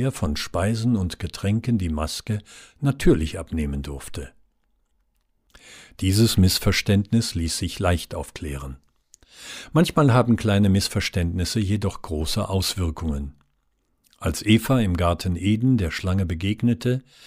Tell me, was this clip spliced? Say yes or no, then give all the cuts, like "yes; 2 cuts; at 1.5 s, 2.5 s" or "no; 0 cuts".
no; 0 cuts